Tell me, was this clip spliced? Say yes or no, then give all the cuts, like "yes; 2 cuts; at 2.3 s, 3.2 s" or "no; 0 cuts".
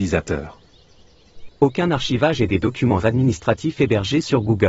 yes; 1 cut; at 1.5 s